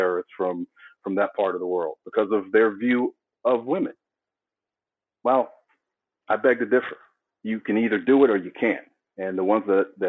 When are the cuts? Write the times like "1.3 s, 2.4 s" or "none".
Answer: none